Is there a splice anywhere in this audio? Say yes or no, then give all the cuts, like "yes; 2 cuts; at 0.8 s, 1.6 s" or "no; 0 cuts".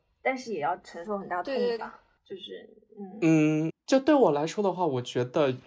yes; 2 cuts; at 1.8 s, 3.7 s